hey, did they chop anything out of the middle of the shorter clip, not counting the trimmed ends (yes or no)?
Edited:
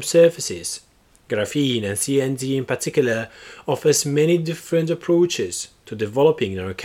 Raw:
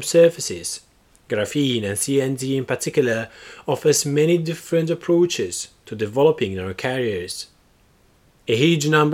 no